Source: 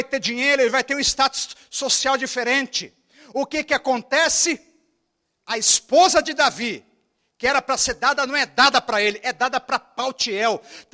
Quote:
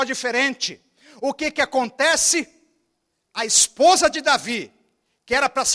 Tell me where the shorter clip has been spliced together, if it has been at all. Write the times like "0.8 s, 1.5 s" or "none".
none